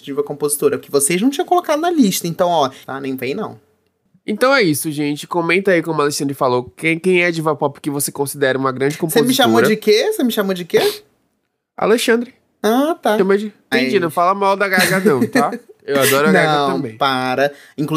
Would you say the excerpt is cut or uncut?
cut